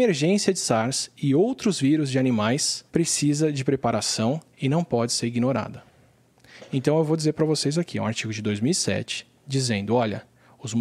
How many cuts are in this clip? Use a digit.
1